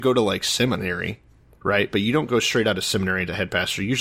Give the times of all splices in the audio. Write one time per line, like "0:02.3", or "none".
none